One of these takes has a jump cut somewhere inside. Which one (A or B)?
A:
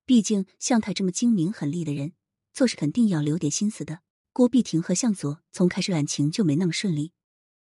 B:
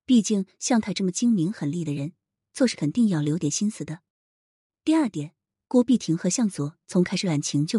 A